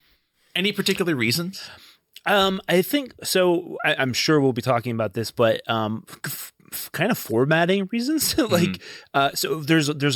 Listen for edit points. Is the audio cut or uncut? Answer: uncut